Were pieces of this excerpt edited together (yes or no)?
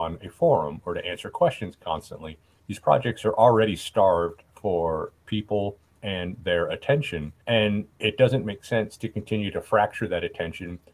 yes